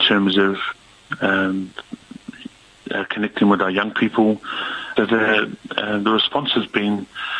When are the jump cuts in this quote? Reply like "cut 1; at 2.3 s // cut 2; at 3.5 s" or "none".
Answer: cut 1; at 5.0 s